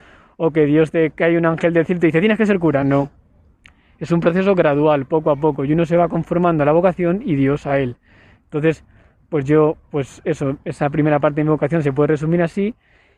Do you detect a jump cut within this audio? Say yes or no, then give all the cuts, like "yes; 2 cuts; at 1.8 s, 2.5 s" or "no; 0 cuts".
no; 0 cuts